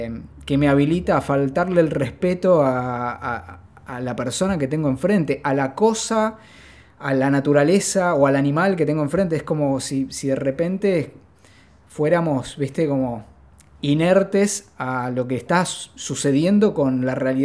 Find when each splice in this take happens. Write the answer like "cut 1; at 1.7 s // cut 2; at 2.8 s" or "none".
none